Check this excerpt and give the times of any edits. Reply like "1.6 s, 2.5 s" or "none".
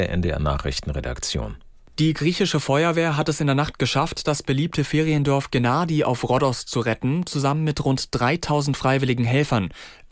none